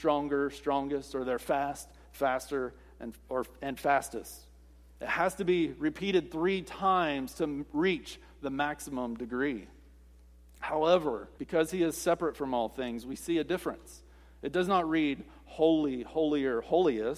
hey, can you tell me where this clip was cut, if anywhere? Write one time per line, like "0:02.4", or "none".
0:11.4